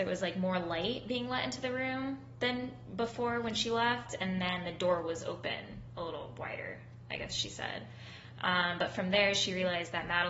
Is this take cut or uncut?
uncut